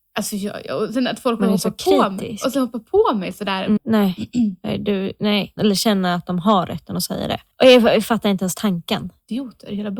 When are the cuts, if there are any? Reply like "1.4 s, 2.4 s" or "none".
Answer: 3.8 s, 5.6 s